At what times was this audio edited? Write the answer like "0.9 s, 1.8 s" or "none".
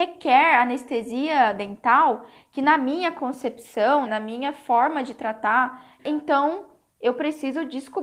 4.1 s, 6.0 s